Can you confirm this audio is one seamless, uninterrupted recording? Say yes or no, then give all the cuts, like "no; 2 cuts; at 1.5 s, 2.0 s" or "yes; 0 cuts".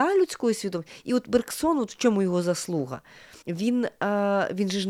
no; 1 cut; at 3.4 s